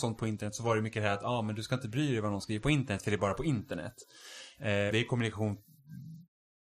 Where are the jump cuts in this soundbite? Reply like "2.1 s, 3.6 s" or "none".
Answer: 4.9 s